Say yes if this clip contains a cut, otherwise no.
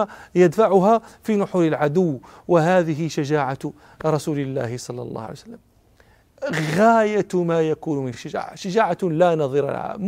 no